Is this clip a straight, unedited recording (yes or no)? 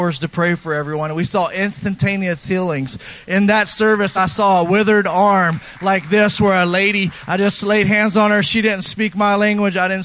yes